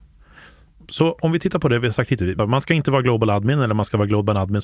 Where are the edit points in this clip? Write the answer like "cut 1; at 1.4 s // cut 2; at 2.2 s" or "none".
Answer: cut 1; at 2.4 s